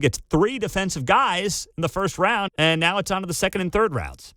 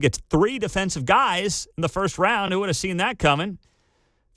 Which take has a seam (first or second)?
first